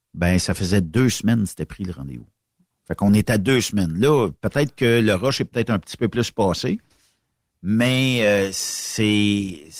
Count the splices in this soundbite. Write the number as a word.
zero